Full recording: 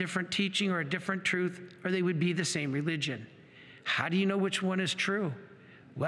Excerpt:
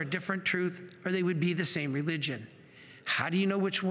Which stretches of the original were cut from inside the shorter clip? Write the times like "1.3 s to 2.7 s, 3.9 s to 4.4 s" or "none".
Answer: none